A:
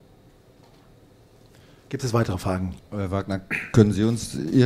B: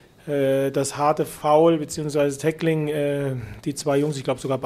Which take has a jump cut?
A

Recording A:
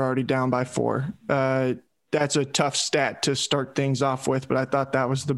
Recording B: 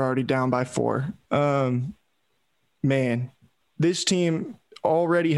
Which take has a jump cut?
B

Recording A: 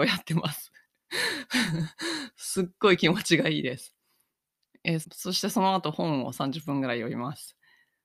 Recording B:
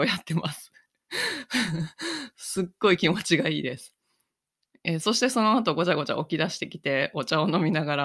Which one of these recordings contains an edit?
A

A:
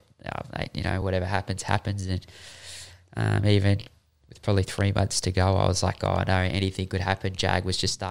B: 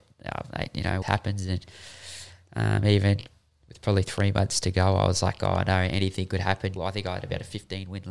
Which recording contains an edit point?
B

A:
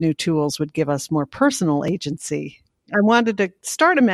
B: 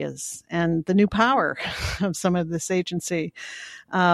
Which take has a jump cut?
A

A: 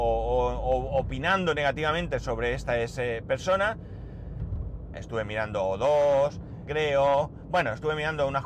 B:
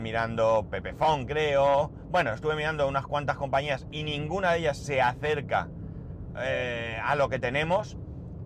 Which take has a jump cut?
A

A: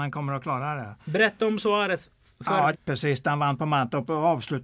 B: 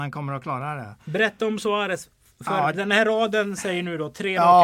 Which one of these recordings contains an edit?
A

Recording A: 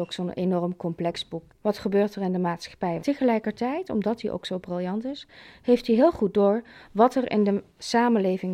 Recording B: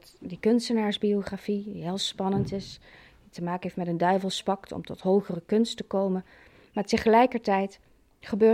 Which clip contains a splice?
A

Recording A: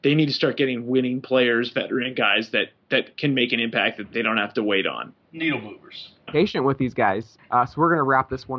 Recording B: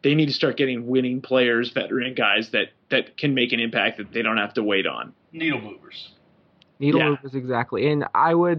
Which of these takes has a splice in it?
A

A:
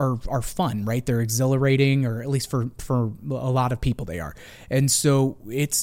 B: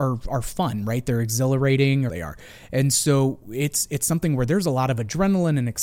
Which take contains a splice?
B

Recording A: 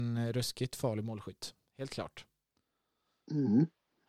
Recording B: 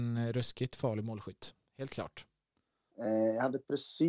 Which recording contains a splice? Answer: B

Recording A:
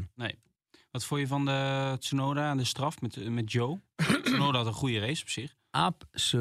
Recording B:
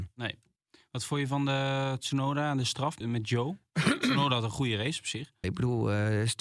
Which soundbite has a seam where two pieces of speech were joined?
B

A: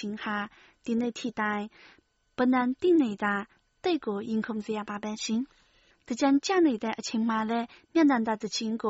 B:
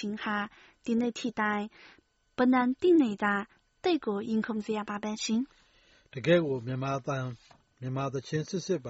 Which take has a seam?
A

